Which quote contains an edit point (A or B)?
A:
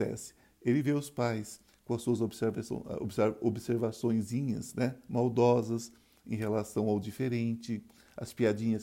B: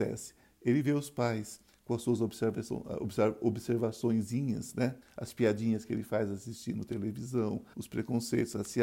B